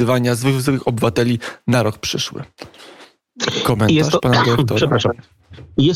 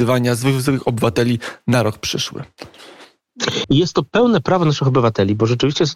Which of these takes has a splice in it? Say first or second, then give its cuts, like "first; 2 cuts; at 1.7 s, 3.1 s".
second; 1 cut; at 3.6 s